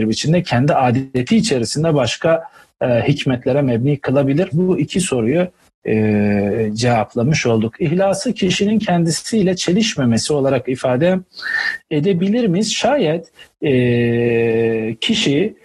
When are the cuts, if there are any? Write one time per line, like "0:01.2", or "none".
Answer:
0:04.5